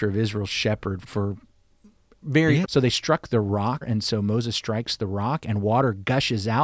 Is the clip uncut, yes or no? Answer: no